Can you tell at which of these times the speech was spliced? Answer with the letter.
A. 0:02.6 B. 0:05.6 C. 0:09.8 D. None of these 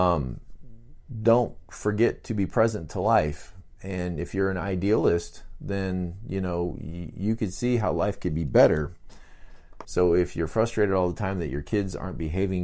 C